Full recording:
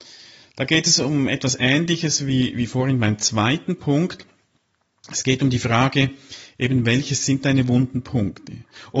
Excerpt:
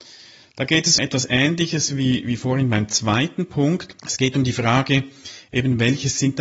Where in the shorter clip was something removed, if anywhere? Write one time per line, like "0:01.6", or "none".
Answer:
0:01.0
0:04.0